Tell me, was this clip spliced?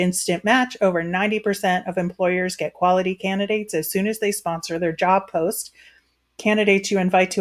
no; 0 cuts

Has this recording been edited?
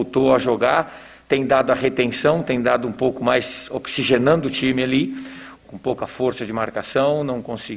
yes; 1 cut; at 5.5 s

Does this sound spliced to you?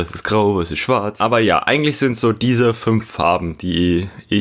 no; 0 cuts

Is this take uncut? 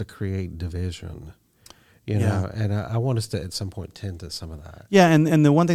yes; 0 cuts

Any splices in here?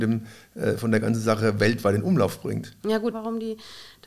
yes; 1 cut; at 3.1 s

